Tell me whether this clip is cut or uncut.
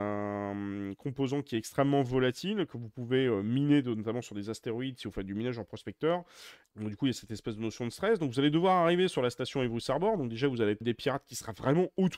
cut